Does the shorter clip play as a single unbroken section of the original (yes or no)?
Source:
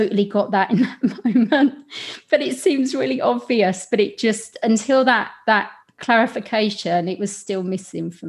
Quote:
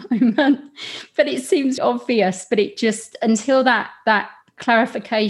no